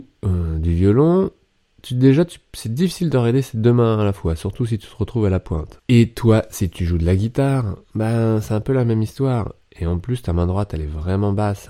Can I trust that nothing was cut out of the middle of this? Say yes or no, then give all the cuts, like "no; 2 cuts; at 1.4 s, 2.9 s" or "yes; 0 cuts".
no; 1 cut; at 5.8 s